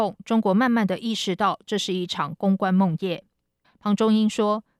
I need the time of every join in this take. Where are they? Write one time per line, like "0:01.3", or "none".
0:03.6